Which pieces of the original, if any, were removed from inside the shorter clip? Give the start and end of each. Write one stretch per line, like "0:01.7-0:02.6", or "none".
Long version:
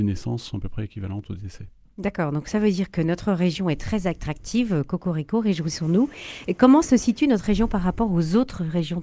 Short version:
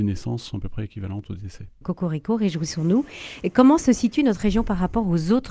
0:01.8-0:04.9